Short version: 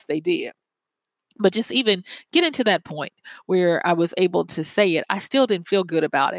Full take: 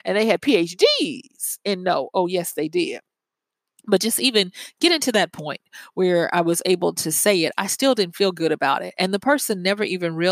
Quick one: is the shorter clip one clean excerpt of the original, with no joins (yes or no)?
yes